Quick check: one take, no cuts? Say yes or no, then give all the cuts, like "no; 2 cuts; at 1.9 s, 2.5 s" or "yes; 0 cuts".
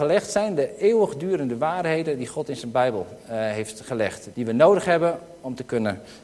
no; 1 cut; at 4.3 s